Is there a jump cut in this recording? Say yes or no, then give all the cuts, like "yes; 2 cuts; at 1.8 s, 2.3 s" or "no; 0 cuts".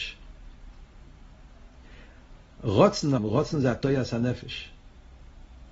yes; 1 cut; at 3.2 s